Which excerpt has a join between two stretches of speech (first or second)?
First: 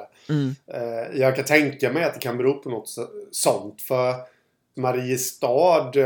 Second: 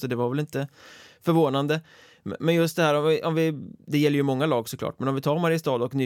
first